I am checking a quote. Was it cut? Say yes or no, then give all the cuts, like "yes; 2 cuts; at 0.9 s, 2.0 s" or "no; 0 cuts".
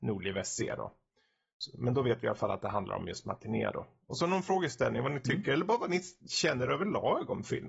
no; 0 cuts